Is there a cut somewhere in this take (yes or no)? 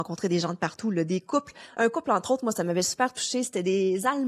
no